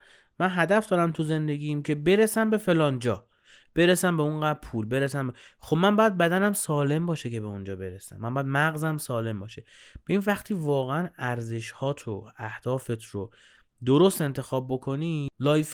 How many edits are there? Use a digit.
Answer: 0